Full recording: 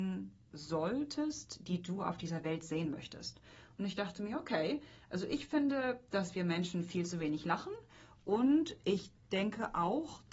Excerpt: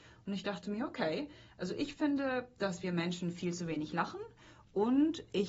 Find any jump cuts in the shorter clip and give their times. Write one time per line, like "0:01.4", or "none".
none